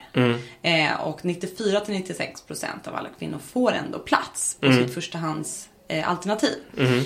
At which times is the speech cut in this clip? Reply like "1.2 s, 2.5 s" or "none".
none